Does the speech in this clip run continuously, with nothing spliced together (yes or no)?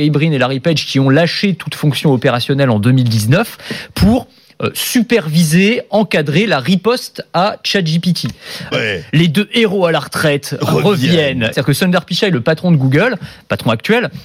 no